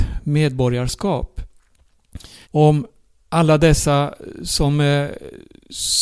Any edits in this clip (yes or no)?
yes